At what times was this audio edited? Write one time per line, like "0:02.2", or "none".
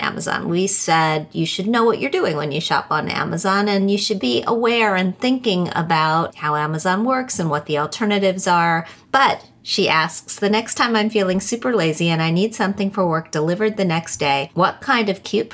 0:09.0